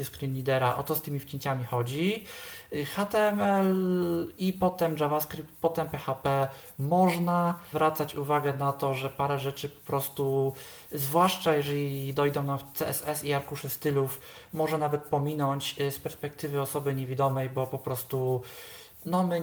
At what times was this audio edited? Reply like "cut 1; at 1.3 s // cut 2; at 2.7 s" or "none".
cut 1; at 7.7 s